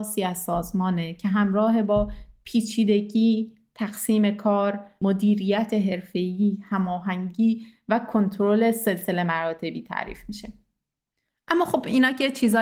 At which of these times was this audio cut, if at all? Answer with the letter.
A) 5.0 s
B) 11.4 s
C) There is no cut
A